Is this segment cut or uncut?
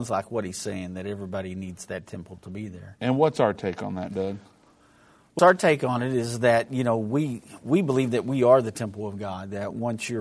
cut